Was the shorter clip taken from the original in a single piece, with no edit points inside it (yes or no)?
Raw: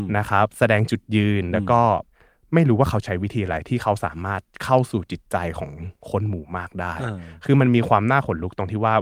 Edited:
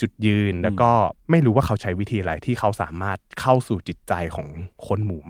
no